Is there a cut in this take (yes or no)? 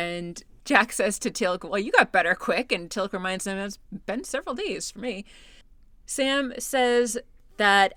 no